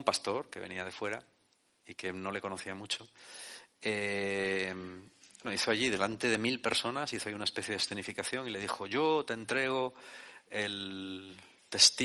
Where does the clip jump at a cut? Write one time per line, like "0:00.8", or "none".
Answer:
0:05.4